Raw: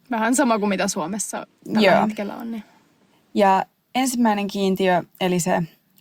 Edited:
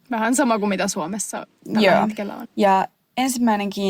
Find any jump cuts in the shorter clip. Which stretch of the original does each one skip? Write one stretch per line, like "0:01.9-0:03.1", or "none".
0:02.4-0:03.2